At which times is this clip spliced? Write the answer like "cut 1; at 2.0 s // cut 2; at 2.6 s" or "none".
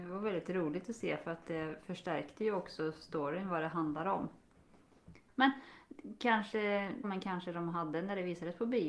cut 1; at 5.3 s // cut 2; at 7.0 s

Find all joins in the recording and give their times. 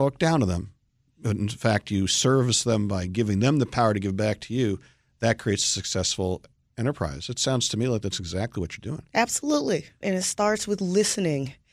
cut 1; at 10.0 s

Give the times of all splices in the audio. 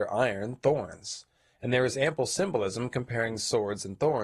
none

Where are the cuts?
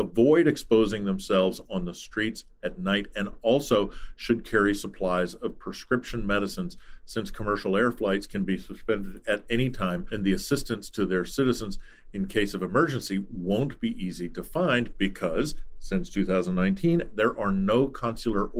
none

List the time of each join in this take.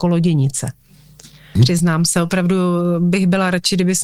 cut 1; at 1.6 s

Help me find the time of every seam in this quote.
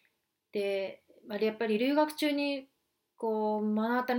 none

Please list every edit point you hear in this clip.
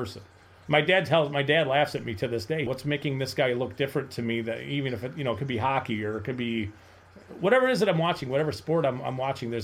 cut 1; at 2.7 s

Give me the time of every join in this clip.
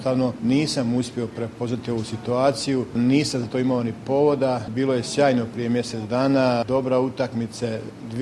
none

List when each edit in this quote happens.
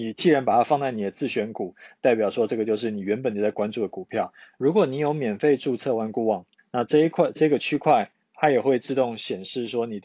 cut 1; at 4.6 s // cut 2; at 6.6 s

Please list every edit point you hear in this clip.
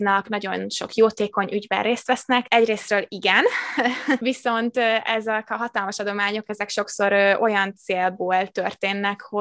none

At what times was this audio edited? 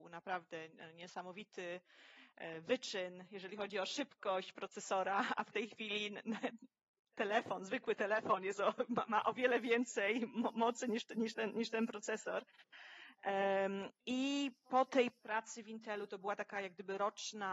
none

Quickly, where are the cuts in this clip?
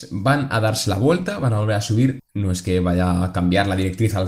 cut 1; at 2.2 s

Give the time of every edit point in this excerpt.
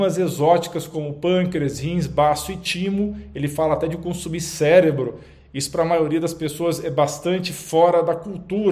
none

